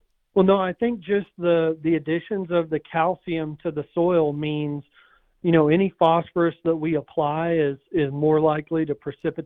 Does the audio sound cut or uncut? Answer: uncut